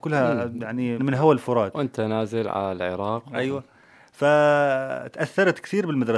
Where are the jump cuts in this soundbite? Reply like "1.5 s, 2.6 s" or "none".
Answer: 1.0 s